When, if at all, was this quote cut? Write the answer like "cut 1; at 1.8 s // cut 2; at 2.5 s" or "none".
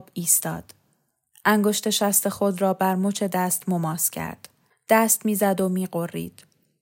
cut 1; at 4.7 s